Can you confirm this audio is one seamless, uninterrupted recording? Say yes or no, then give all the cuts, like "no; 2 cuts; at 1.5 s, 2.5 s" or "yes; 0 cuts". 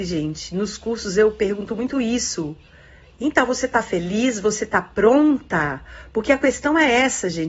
yes; 0 cuts